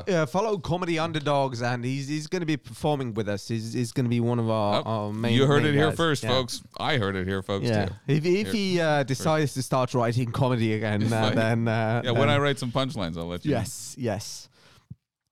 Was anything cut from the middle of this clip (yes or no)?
no